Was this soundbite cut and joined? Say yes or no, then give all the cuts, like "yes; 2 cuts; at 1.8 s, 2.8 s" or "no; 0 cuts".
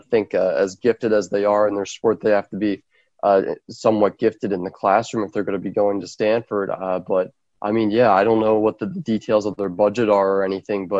no; 0 cuts